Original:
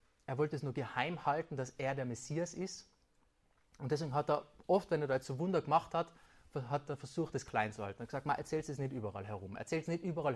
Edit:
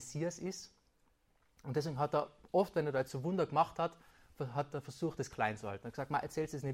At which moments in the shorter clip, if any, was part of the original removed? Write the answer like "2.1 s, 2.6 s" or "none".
none